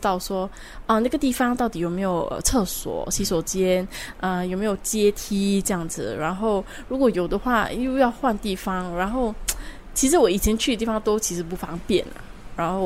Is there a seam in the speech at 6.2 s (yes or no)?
no